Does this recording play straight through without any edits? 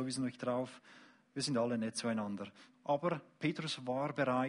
no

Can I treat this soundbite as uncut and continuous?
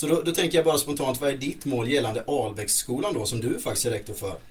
yes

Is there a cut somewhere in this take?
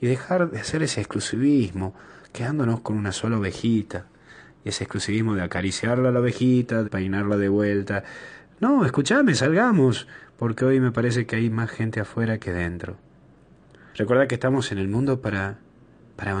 yes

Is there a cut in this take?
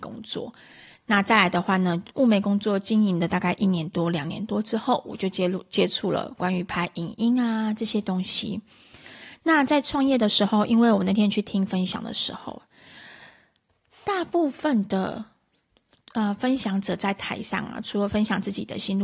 no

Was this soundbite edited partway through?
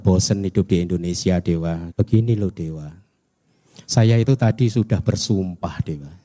yes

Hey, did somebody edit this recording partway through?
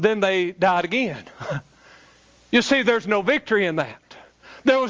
no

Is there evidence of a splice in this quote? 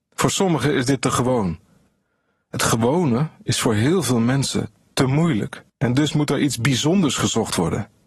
yes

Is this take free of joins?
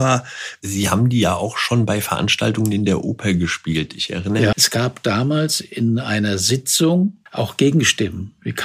no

